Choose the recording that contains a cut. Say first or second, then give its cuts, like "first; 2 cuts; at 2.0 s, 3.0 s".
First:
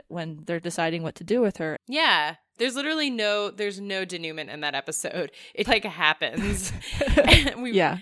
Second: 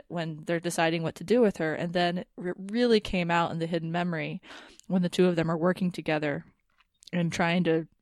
first; 2 cuts; at 1.8 s, 5.6 s